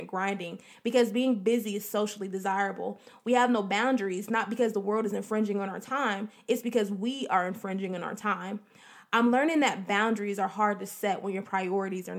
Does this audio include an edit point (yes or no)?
no